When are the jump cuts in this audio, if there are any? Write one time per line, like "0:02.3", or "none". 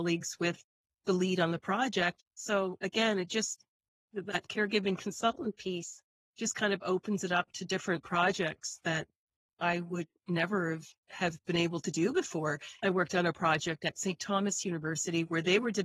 0:02.2
0:12.8